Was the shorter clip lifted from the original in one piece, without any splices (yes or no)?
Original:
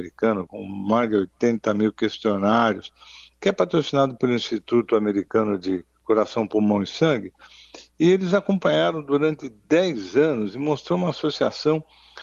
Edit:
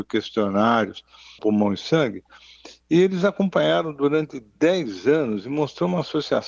no